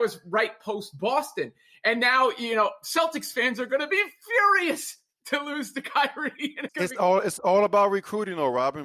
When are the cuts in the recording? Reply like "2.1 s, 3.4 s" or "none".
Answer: 6.7 s

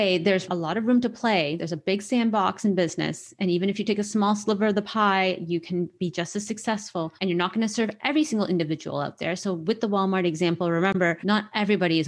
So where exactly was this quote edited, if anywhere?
none

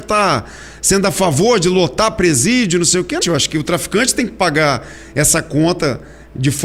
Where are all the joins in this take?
3.2 s

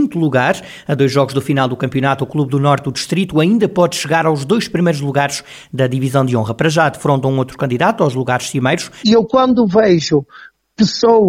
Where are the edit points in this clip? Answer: 9.0 s

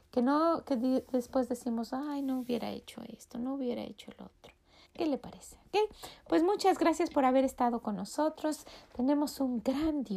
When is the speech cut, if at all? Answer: 4.9 s

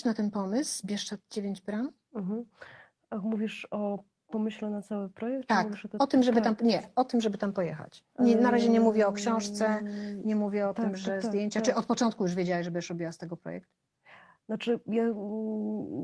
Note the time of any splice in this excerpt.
8.1 s

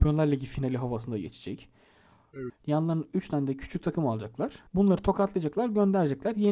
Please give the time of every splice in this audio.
2.5 s, 4.7 s

